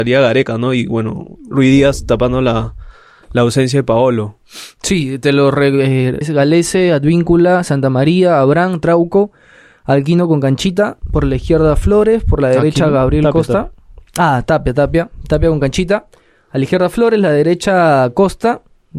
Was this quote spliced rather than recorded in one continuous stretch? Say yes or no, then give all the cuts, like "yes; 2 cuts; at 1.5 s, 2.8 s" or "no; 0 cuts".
yes; 1 cut; at 6.2 s